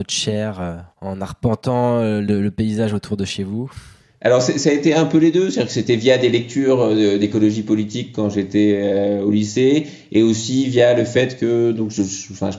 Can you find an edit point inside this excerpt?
no; 0 cuts

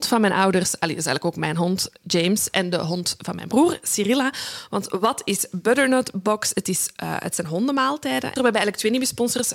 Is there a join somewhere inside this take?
yes; 1 cut; at 8.4 s

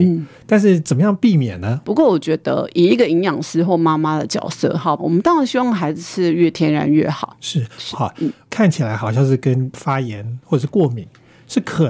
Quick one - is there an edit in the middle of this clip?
yes; 3 cuts; at 1.8 s, 5.0 s, 7.9 s

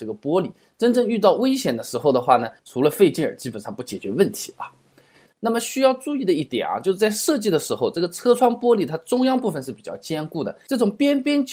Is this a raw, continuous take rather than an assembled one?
no; 2 cuts; at 2.6 s, 5.3 s

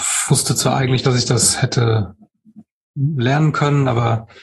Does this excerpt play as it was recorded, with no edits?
yes; 0 cuts

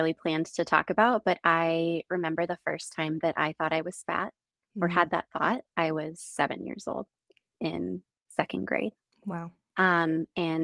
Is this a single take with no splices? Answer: yes; 0 cuts

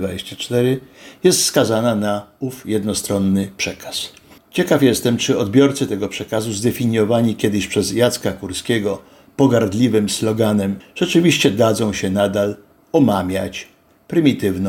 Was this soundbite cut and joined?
yes; 2 cuts; at 4.4 s, 10.8 s

